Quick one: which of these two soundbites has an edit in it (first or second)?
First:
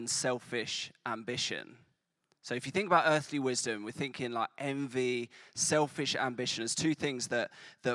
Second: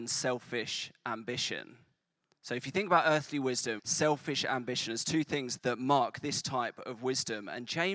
second